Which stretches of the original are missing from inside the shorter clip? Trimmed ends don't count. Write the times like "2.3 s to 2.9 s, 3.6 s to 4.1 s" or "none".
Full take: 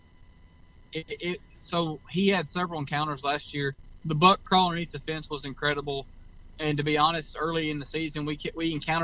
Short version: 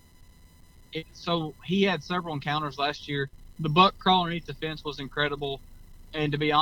1.0 s to 1.5 s